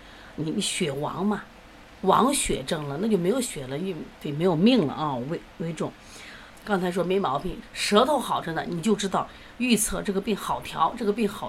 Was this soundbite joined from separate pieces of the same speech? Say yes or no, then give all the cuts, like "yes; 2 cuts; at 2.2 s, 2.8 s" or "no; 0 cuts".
yes; 2 cuts; at 6.5 s, 7.6 s